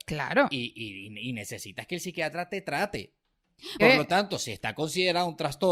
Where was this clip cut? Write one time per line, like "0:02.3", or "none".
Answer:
0:03.8

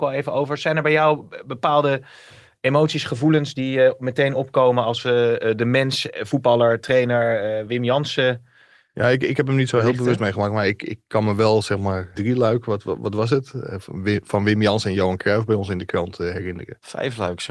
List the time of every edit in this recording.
0:12.1

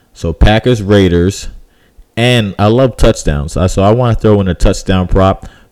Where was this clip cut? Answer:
none

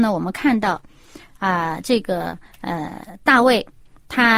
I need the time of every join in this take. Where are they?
none

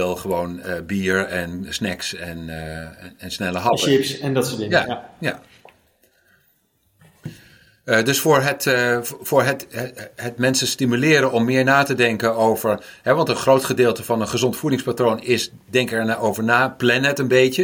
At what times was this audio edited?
none

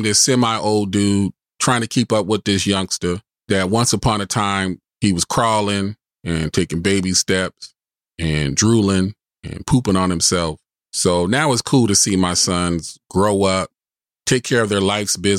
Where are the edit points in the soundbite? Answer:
0:04.8
0:14.1

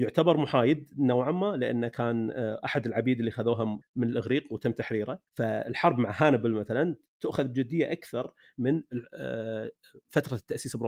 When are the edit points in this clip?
0:03.8
0:05.3

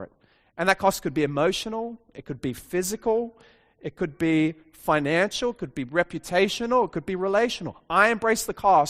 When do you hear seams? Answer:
none

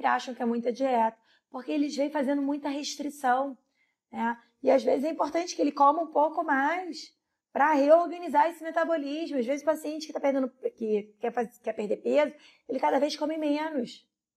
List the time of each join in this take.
none

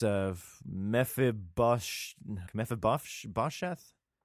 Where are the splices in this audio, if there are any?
0:02.5

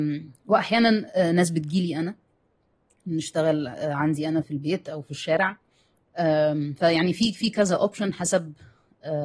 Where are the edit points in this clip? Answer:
0:04.4

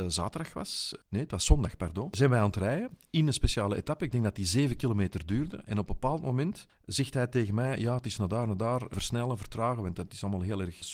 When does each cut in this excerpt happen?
none

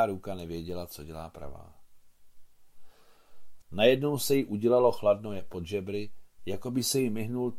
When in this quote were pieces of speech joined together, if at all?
0:03.6
0:06.4

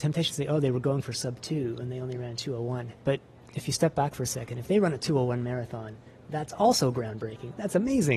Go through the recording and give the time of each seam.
0:03.0

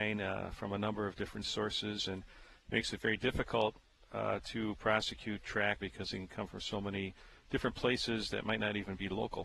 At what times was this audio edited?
0:05.8

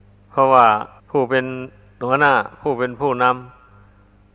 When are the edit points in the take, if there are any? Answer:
0:01.0

